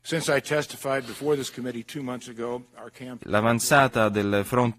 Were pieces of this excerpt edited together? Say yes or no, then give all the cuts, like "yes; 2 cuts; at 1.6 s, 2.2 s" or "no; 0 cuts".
yes; 1 cut; at 3.2 s